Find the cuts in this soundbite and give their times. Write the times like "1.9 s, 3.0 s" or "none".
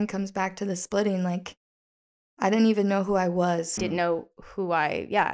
3.8 s